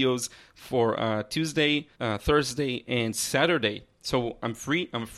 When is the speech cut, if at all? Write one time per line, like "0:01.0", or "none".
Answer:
0:01.9